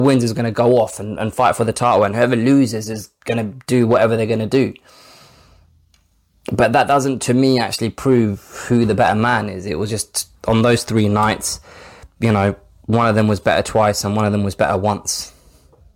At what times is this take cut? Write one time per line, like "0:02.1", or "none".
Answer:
none